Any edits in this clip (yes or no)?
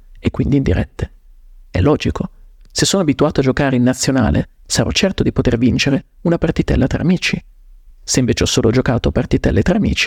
no